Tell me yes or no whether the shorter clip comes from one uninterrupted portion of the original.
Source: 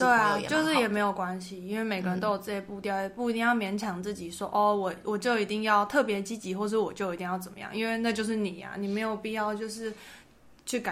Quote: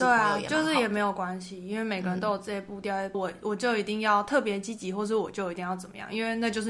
no